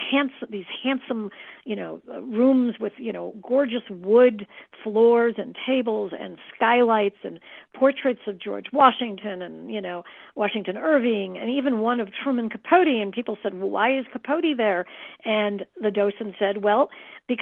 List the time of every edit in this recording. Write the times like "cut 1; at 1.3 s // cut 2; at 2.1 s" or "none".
none